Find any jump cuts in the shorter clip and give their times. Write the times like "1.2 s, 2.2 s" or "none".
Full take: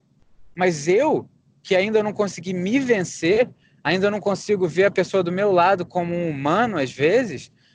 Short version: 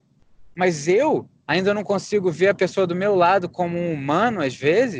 1.5 s

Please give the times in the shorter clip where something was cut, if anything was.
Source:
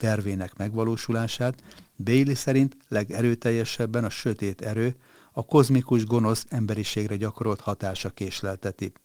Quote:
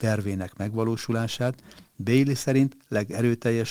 none

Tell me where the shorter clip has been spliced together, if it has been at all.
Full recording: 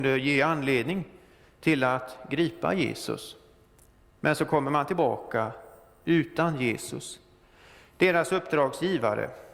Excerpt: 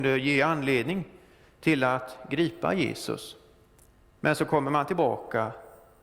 none

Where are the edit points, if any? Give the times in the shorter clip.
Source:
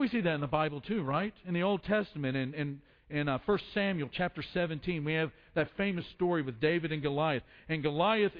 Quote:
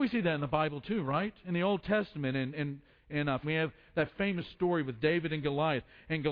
3.4 s

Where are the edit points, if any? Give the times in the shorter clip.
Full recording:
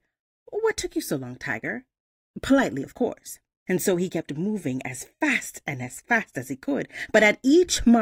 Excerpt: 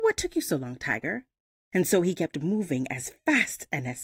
1.7 s

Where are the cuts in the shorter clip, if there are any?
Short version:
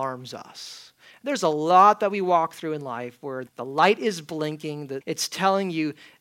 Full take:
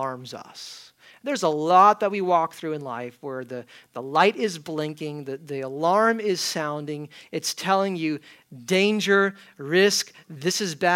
3.5 s, 5.0 s

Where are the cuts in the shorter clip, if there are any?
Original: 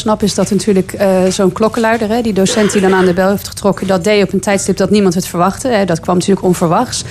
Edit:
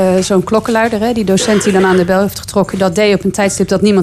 none

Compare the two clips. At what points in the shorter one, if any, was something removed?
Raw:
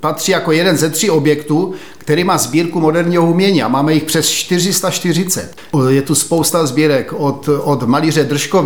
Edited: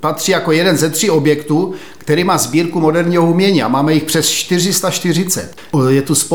none

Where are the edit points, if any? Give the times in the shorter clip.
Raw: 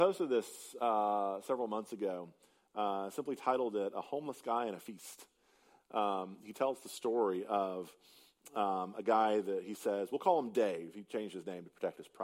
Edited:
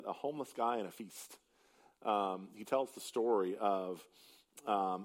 none

